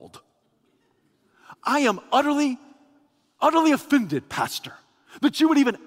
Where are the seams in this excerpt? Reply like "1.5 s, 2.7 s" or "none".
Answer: none